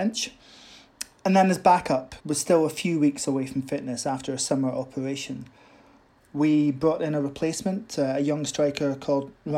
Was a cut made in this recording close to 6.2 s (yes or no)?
yes